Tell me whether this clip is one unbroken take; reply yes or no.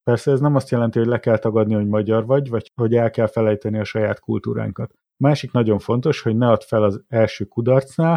yes